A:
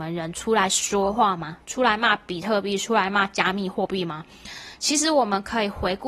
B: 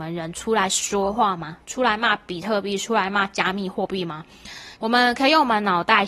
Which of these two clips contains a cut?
B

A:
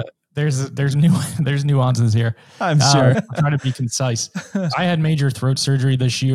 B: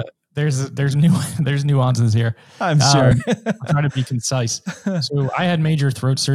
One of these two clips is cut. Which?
A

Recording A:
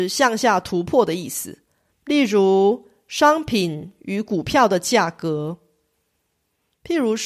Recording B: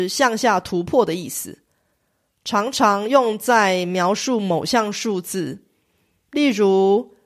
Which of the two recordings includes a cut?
A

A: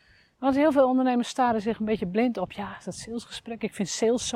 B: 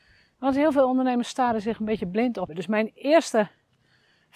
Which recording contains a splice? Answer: B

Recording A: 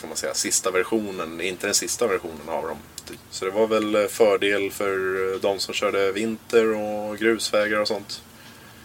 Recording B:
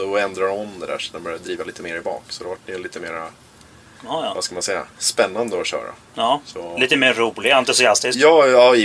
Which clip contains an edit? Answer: A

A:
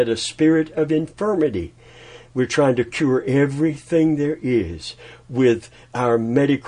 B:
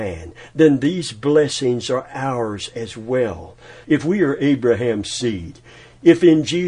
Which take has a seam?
B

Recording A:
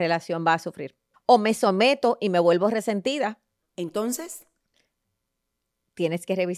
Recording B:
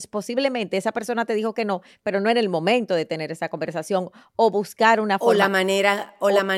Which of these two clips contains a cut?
A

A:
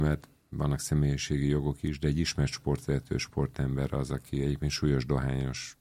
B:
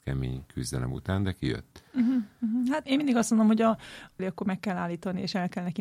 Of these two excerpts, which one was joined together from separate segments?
B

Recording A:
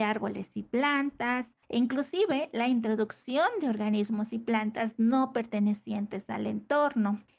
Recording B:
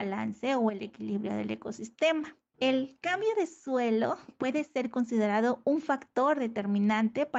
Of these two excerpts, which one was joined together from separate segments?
A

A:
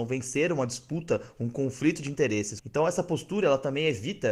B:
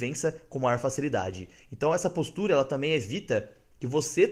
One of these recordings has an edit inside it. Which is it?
A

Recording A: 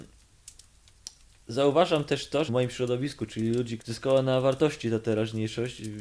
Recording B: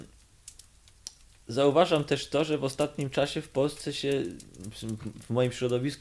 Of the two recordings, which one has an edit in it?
A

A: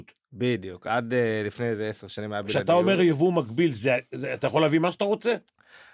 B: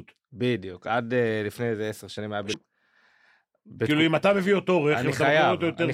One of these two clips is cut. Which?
B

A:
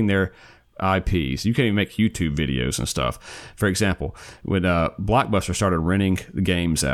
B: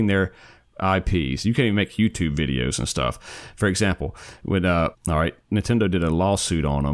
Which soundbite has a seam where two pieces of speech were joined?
B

